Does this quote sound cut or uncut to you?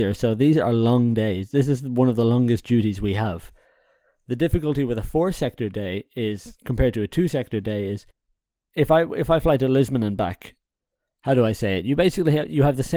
uncut